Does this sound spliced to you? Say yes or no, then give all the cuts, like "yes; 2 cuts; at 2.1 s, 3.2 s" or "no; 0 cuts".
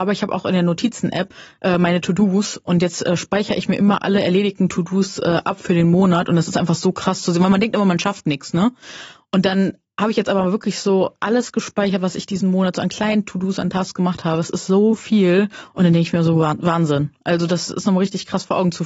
no; 0 cuts